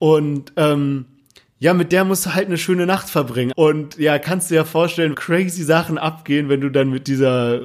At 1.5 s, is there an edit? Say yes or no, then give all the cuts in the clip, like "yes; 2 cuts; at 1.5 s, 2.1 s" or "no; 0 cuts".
no; 2 cuts; at 3.5 s, 5.1 s